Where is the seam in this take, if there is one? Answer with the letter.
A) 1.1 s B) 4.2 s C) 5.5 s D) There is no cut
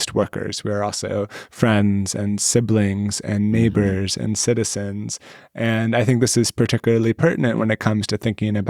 D